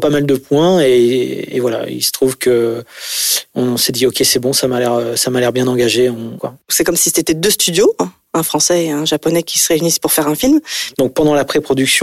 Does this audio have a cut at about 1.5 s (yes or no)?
no